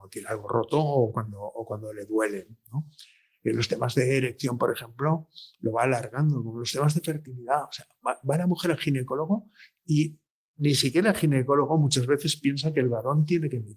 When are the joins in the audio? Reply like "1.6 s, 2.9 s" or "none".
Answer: none